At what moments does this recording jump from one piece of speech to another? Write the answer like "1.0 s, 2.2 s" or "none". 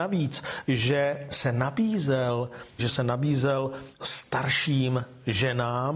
2.8 s